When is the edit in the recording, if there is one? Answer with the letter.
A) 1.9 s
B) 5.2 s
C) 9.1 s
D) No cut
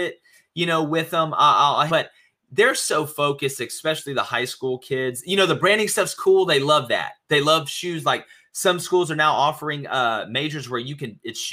A